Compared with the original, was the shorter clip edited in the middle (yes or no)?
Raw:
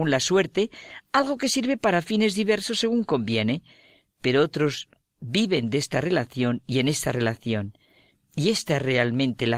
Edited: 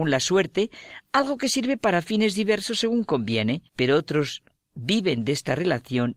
yes